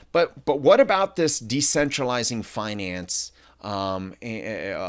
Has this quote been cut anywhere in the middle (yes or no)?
no